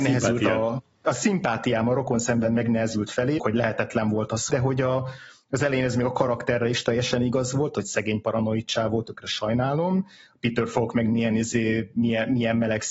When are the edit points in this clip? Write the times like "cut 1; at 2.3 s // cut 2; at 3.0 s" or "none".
cut 1; at 3.4 s // cut 2; at 4.5 s